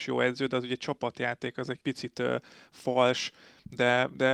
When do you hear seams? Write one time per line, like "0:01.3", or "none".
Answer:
0:01.8